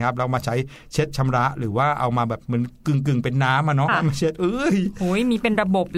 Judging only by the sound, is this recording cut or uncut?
cut